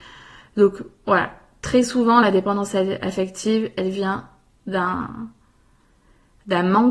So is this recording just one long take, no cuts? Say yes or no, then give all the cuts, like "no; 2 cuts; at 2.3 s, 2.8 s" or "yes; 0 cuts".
yes; 0 cuts